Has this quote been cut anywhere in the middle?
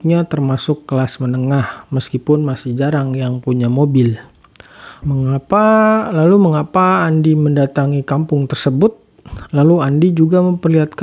yes; 2 cuts; at 5.0 s, 9.5 s

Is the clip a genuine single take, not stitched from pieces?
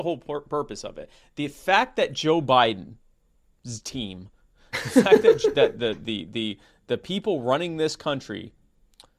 yes; 0 cuts

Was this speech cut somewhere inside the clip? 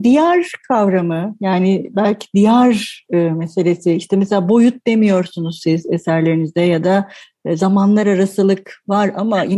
no; 0 cuts

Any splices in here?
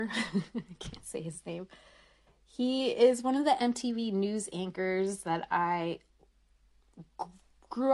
no; 0 cuts

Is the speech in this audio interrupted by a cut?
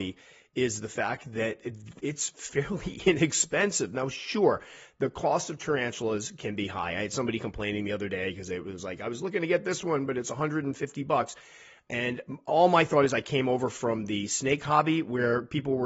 no; 0 cuts

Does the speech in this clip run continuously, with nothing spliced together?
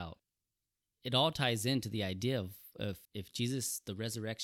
no; 1 cut; at 3.1 s

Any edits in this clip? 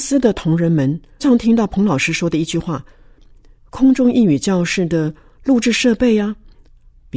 yes; 2 cuts; at 1.2 s, 3.6 s

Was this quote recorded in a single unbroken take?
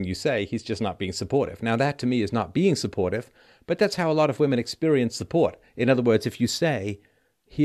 yes; 0 cuts

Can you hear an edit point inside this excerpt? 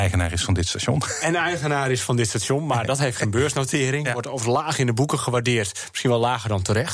no; 0 cuts

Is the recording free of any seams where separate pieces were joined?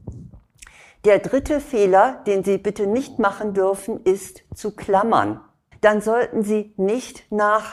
no; 1 cut; at 5.7 s

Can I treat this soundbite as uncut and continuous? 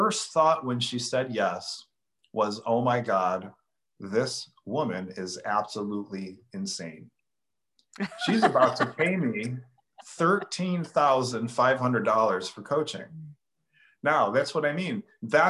yes; 0 cuts

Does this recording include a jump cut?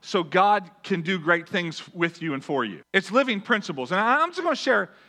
yes; 1 cut; at 2.8 s

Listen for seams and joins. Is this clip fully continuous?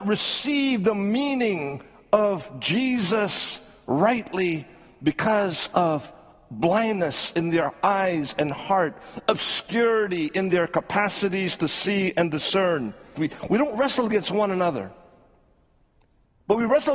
no; 1 cut; at 13.2 s

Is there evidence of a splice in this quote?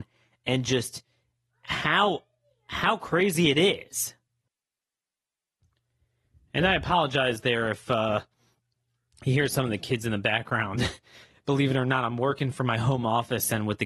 no; 0 cuts

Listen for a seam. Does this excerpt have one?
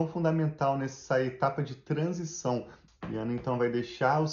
yes; 1 cut; at 2.9 s

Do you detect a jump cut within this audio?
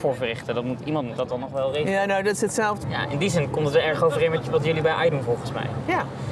yes; 1 cut; at 2.8 s

